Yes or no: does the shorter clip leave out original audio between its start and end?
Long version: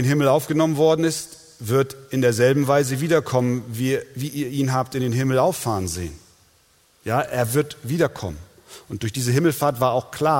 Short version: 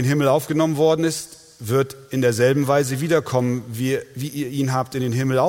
no